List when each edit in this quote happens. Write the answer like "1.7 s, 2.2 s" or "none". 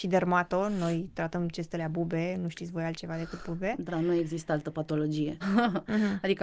3.9 s, 5.4 s